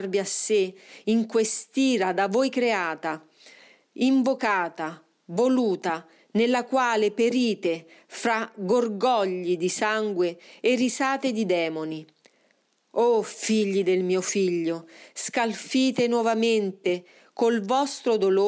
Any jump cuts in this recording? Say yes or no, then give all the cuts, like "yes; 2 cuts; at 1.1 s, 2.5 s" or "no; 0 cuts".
no; 0 cuts